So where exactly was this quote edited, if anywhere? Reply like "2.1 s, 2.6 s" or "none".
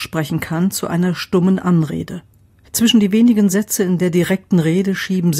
2.6 s